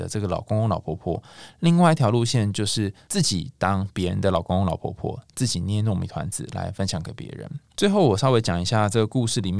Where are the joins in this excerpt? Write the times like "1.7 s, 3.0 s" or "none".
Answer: none